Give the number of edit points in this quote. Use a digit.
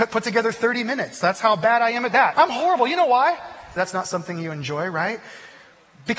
2